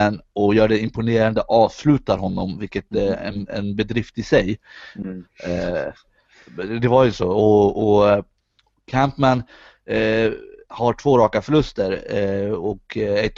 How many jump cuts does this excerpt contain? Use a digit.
1